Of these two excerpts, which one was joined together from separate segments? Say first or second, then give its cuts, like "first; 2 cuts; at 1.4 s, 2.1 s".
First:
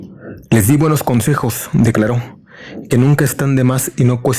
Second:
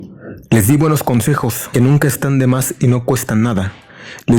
second; 1 cut; at 1.7 s